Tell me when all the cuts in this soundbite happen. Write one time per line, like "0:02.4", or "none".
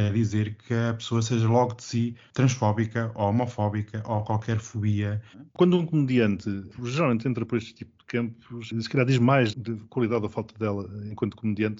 0:05.3
0:09.5